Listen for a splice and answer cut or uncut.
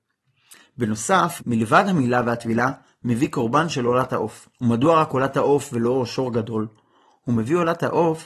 cut